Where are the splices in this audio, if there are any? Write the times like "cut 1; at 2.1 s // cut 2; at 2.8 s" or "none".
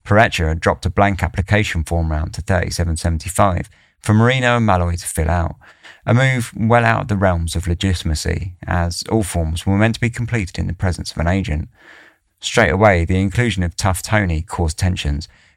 cut 1; at 12.3 s